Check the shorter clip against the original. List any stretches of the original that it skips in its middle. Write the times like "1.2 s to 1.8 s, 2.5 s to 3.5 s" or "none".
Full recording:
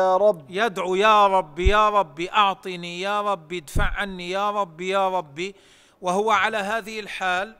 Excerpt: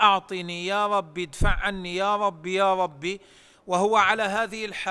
none